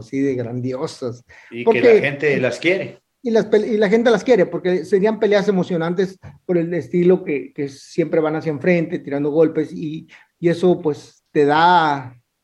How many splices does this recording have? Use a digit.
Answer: 0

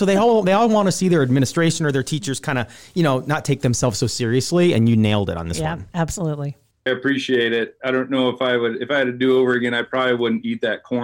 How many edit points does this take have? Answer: 1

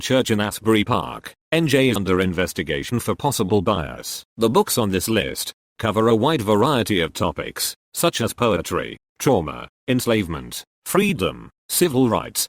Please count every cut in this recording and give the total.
3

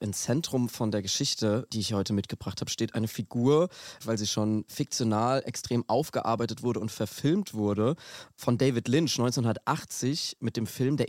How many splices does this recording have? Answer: 1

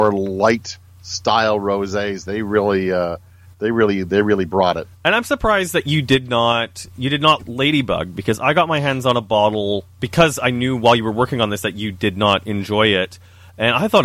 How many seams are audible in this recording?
2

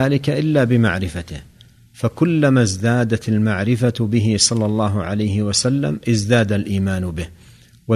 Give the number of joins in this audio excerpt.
0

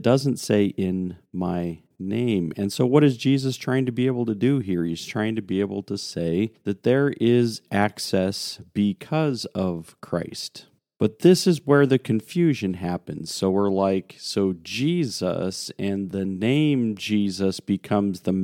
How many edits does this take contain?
1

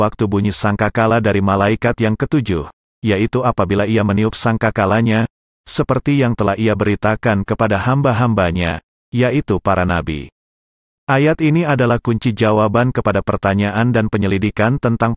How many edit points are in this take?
1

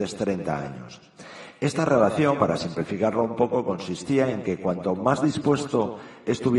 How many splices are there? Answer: 0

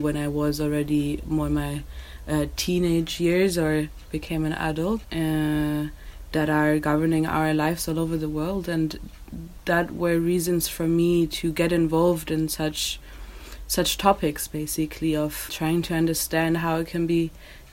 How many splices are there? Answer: 2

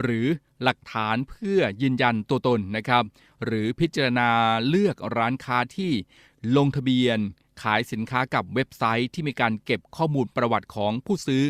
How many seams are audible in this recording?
0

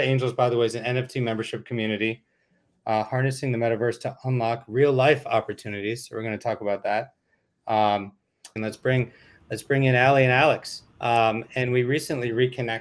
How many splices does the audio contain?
2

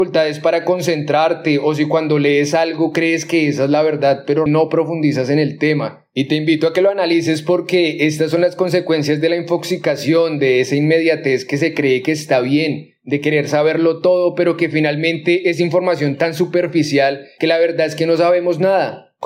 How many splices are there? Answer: 1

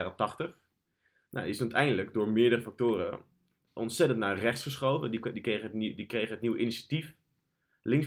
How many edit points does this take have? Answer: 1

